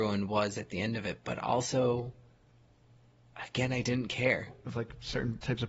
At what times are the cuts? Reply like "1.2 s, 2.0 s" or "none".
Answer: 4.6 s